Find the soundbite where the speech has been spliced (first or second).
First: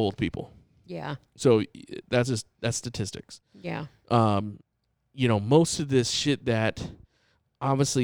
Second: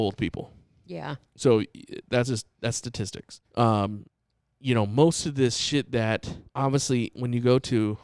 second